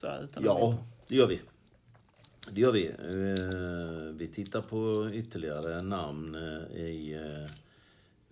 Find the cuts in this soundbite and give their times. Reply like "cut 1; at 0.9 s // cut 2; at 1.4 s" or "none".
none